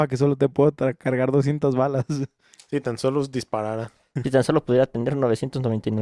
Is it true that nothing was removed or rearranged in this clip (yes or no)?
yes